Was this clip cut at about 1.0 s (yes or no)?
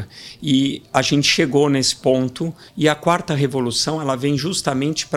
no